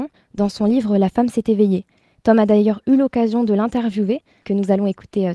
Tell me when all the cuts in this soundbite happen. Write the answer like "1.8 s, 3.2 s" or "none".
4.4 s